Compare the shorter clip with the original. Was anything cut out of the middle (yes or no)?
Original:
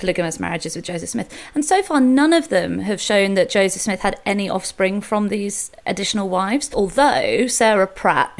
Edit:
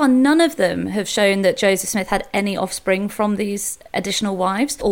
no